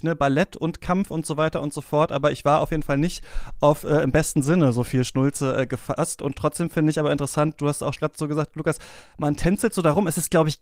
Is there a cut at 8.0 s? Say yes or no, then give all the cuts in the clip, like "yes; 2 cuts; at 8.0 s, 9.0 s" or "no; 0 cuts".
yes; 1 cut; at 8.0 s